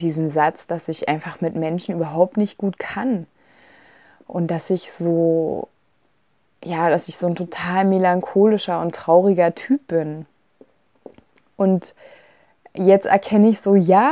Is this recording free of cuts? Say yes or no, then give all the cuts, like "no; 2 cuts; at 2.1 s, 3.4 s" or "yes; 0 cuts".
yes; 0 cuts